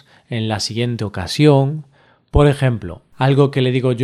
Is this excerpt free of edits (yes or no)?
yes